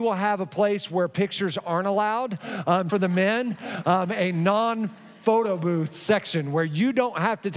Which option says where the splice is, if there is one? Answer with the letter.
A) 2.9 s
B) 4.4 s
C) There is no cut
A